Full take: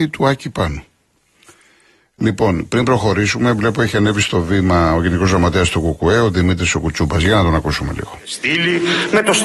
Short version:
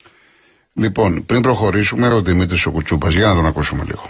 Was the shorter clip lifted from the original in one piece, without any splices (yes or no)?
no